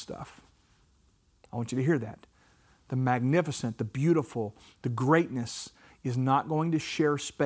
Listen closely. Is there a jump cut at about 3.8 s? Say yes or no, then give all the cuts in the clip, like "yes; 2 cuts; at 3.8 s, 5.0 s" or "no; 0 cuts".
no; 0 cuts